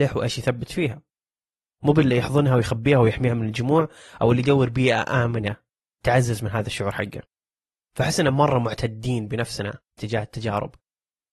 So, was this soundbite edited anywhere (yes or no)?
no